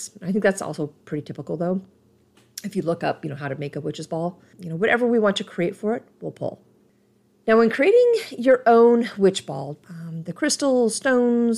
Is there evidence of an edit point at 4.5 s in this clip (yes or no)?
yes